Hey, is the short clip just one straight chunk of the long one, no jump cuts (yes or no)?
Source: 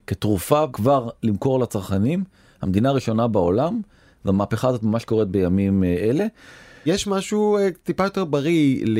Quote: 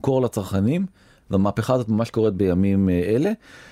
no